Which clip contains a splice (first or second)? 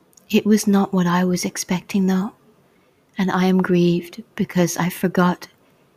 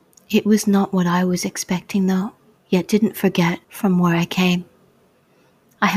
second